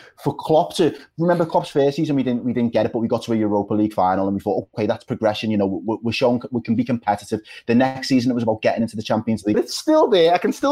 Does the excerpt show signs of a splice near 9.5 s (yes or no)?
yes